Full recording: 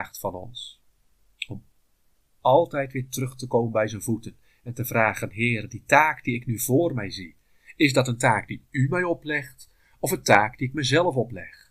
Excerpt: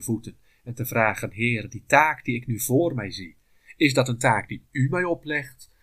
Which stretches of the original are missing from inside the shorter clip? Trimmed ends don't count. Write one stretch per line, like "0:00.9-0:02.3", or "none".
none

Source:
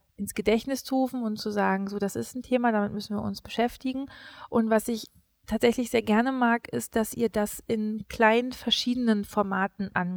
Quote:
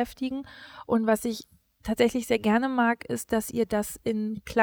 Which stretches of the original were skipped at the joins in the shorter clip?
none

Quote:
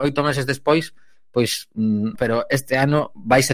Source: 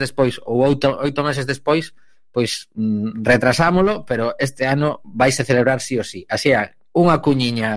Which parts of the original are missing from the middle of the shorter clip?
0:03.1-0:04.0

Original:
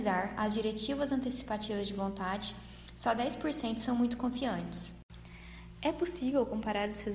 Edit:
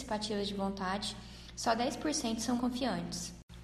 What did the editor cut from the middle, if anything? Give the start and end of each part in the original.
0:04.0-0:04.2

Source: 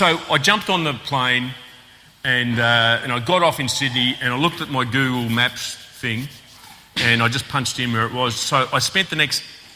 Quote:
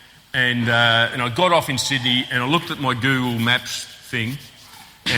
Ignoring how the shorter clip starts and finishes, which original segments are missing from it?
none

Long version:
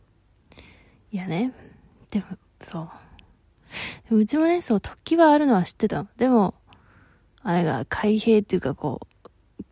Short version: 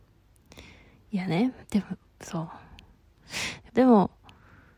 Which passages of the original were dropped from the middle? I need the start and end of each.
0:01.6-0:02.0
0:04.1-0:06.1

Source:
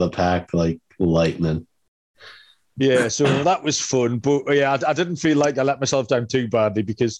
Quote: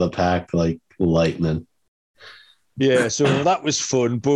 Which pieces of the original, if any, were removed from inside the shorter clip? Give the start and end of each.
none

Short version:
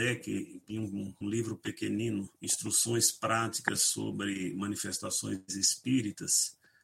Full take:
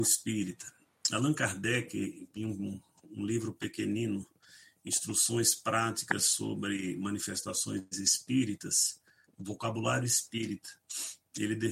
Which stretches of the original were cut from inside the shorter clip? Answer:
0:02.9-0:03.2
0:04.3-0:04.8

